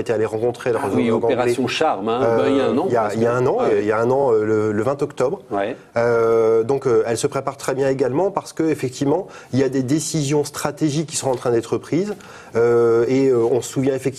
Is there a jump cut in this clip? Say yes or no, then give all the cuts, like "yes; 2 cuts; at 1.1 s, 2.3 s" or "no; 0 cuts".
no; 0 cuts